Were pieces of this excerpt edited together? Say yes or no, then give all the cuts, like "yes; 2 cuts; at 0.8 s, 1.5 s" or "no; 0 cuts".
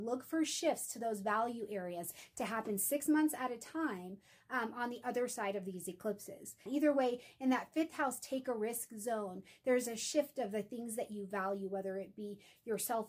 yes; 1 cut; at 6.7 s